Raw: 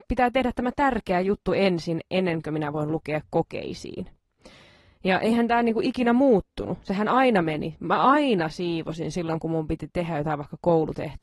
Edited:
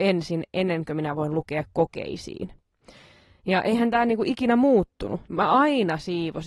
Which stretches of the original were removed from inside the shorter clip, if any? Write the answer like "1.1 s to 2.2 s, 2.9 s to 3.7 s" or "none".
6.8 s to 7.8 s